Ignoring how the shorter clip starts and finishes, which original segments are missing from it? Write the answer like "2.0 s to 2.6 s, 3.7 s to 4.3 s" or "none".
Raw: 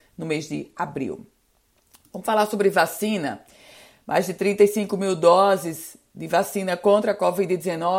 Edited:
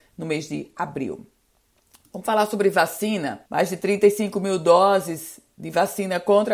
3.5 s to 4.0 s